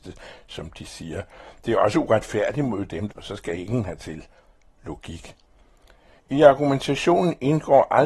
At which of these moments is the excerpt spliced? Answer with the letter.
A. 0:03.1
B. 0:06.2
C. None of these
A